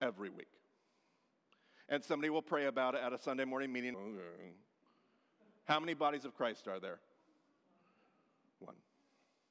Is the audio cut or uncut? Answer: cut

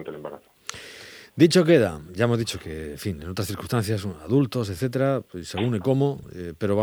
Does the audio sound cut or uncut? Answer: cut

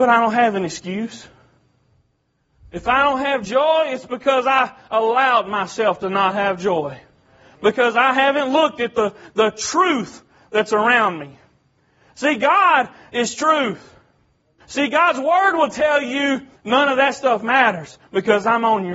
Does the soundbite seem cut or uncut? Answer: cut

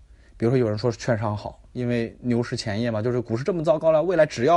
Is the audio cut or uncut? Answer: uncut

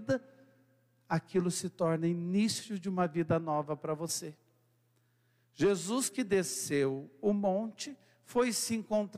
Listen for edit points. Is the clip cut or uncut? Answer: uncut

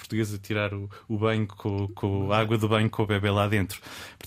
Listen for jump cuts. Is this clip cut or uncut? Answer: uncut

